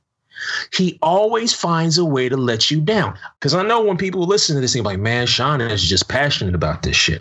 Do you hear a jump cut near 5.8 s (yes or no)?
no